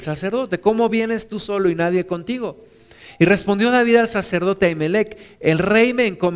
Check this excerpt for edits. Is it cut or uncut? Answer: uncut